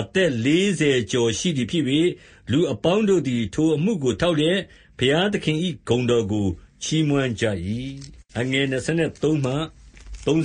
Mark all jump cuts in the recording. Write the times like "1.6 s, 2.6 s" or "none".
8.3 s

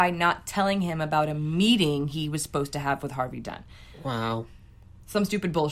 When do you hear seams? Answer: none

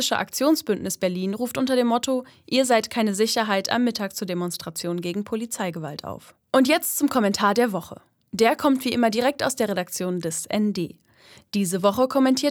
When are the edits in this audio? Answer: 6.5 s

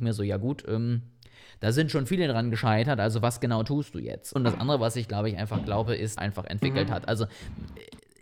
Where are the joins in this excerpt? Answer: 4.4 s, 6.2 s

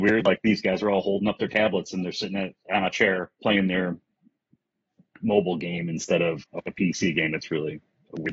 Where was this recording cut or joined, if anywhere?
3.3 s, 6.4 s

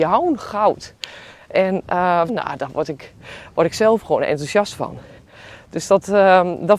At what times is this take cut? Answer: 2.3 s

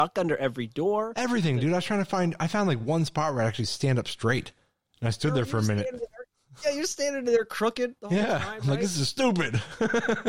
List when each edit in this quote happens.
none

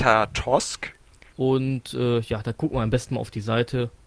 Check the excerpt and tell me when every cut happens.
1.3 s

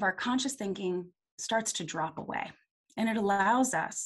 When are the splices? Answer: none

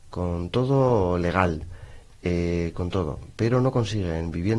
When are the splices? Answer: 2.7 s

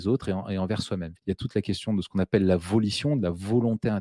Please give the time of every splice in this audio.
1.2 s

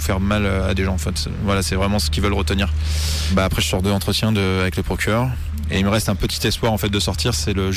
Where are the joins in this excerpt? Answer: none

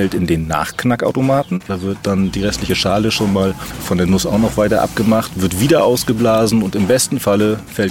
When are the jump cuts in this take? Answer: none

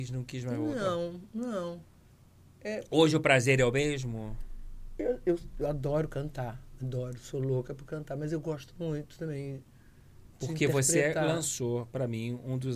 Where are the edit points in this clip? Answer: none

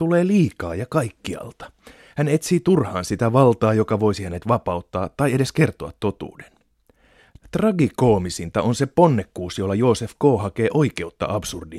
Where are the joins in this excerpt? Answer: none

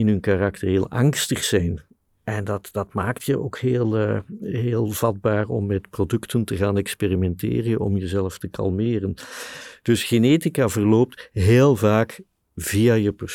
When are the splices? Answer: none

